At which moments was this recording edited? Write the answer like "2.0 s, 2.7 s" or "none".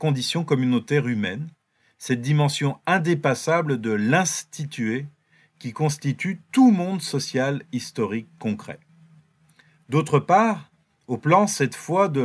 none